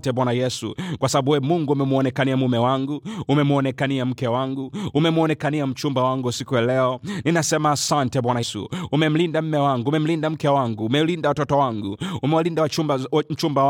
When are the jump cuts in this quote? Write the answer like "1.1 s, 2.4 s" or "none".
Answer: 8.4 s